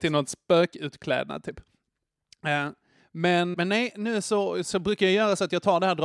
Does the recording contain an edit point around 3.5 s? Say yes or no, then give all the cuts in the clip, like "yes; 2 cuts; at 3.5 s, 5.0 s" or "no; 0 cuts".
yes; 1 cut; at 3.5 s